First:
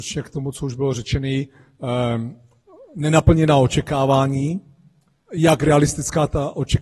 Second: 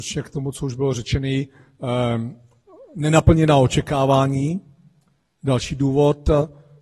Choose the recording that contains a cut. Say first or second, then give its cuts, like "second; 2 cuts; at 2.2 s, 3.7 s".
first; 1 cut; at 5.3 s